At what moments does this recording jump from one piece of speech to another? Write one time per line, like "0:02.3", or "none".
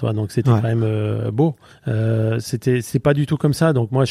0:01.7